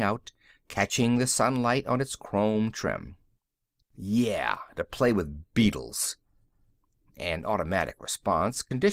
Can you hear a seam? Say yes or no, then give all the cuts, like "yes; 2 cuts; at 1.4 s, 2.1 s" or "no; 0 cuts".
yes; 2 cuts; at 3.8 s, 7.0 s